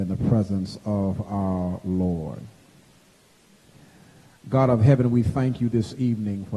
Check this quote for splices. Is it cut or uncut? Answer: uncut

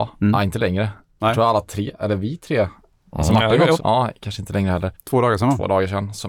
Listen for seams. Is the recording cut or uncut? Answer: cut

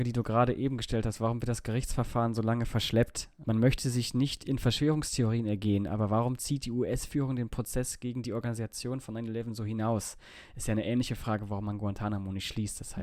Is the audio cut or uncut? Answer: cut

